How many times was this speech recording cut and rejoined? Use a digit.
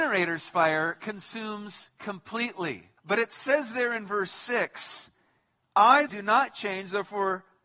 2